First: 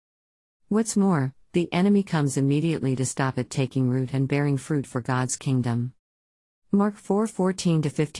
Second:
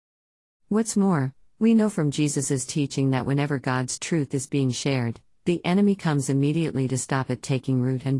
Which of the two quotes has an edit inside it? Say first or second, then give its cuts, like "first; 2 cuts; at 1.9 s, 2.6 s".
first; 1 cut; at 1.4 s